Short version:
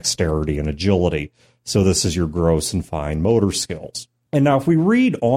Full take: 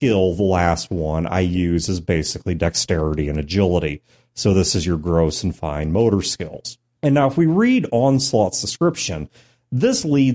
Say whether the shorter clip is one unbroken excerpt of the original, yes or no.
yes